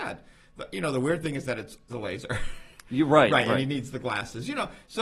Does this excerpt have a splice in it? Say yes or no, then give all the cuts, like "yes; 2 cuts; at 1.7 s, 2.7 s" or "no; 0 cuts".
yes; 1 cut; at 1.9 s